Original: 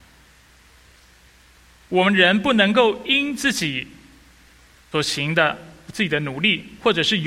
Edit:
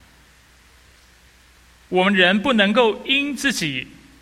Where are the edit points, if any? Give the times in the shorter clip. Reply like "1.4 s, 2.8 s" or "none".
none